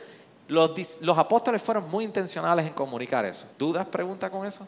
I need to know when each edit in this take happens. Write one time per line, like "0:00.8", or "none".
0:03.5